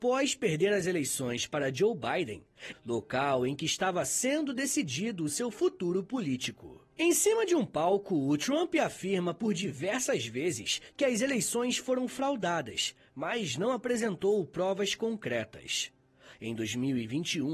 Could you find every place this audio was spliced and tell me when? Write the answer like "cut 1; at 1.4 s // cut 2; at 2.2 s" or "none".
cut 1; at 2.7 s // cut 2; at 6.9 s // cut 3; at 16.3 s